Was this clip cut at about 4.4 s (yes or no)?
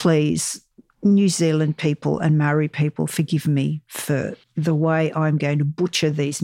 yes